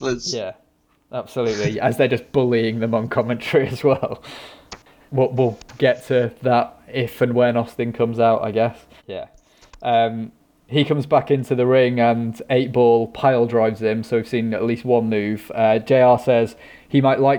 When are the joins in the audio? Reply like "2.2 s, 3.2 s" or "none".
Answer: 5.0 s, 9.0 s